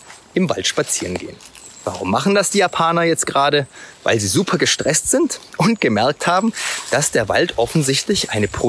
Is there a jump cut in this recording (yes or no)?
no